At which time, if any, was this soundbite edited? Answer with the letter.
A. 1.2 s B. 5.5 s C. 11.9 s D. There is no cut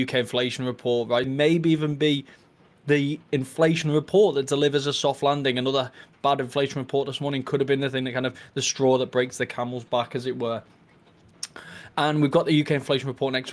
A